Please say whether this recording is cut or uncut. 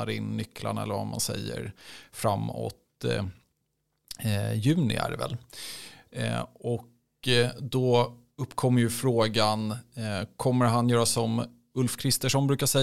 uncut